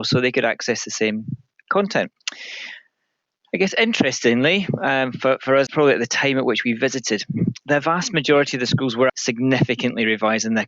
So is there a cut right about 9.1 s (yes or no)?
yes